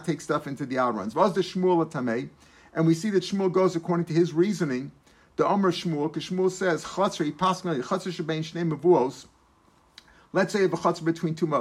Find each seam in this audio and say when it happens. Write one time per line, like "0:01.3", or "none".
none